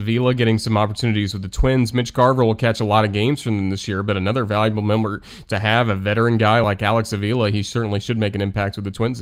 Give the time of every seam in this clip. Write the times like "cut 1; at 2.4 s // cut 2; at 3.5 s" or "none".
none